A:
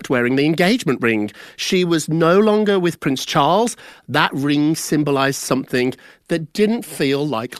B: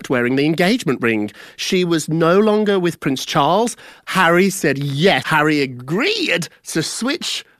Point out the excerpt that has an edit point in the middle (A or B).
B